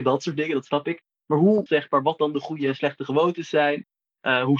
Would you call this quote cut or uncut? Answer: cut